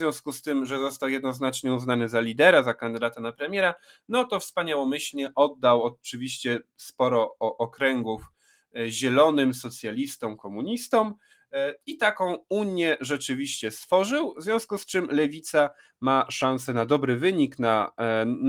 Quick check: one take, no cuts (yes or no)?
yes